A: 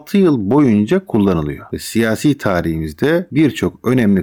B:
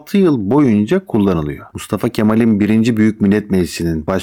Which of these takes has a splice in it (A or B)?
B